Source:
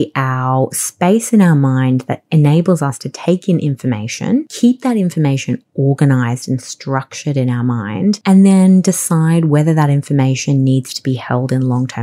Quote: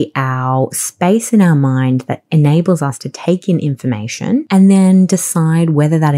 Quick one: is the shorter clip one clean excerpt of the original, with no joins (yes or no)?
no